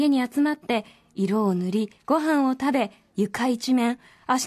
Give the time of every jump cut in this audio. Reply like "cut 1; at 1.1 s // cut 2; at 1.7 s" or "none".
none